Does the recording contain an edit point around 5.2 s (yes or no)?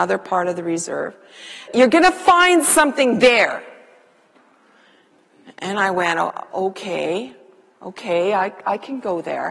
no